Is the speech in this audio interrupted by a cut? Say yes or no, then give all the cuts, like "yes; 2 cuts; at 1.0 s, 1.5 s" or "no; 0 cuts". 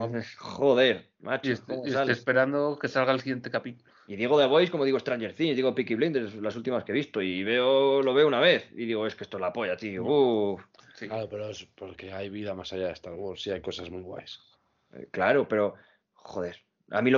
no; 0 cuts